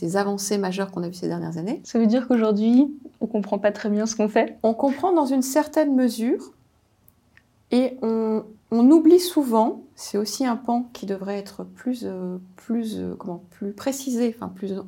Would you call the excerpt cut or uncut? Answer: cut